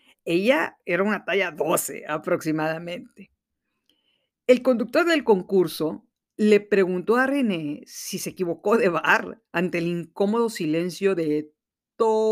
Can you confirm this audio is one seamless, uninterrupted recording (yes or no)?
yes